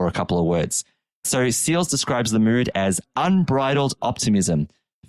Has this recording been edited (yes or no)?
no